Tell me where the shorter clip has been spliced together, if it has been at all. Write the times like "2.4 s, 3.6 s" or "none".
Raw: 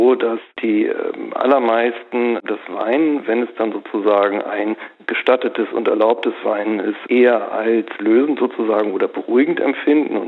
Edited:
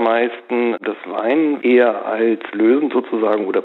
1.6 s